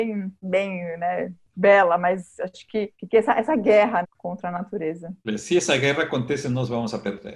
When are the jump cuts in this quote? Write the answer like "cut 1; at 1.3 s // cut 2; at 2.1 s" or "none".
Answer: cut 1; at 4.0 s